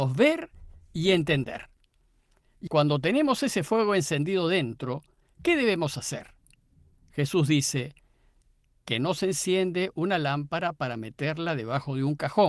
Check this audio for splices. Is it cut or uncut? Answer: cut